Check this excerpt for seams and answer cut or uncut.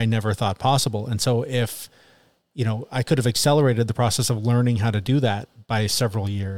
uncut